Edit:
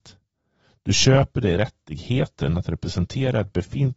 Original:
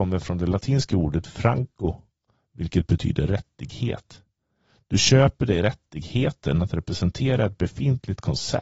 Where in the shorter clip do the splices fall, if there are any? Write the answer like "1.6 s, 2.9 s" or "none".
none